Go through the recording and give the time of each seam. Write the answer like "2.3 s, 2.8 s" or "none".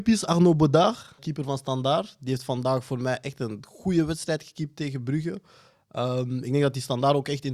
1.2 s